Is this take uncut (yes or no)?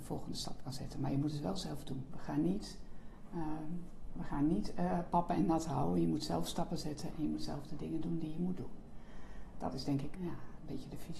no